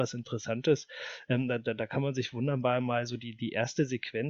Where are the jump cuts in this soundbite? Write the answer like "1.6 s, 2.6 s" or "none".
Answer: none